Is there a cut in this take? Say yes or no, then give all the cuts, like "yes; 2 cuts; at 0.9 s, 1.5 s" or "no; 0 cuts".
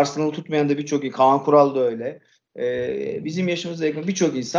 no; 0 cuts